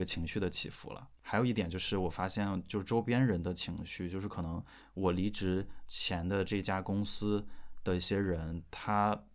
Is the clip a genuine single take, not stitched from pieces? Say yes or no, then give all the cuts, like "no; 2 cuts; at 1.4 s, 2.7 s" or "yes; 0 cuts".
yes; 0 cuts